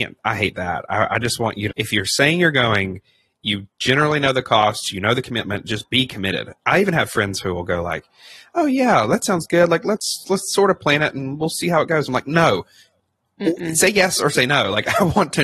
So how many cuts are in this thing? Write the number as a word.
one